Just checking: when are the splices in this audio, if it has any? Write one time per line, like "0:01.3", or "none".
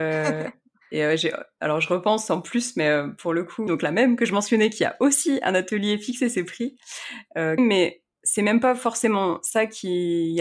0:03.7
0:07.6